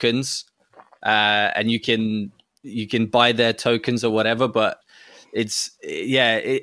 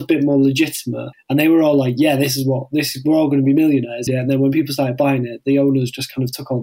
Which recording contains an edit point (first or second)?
second